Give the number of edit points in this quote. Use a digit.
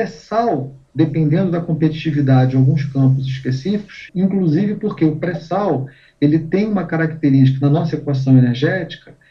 1